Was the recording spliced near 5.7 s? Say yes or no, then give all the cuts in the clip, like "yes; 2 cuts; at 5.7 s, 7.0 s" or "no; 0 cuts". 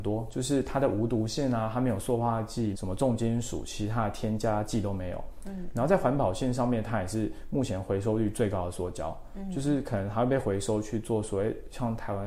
no; 1 cut; at 2.7 s